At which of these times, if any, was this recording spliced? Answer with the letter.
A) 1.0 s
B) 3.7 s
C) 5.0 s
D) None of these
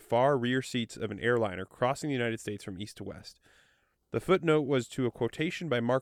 D